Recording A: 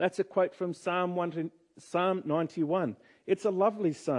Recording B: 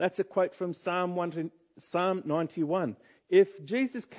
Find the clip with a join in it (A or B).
B